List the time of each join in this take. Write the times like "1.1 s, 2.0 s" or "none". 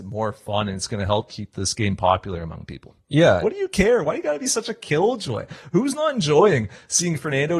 3.4 s